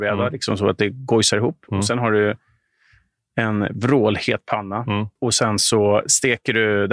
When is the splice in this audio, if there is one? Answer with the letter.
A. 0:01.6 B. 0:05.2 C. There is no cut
B